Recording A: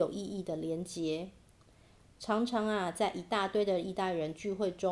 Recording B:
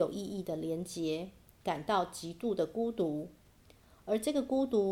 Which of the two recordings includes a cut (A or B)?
B